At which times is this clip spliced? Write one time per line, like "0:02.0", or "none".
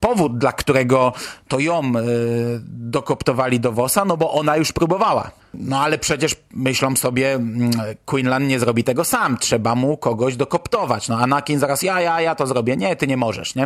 0:05.4